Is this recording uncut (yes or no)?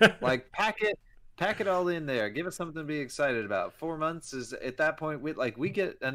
yes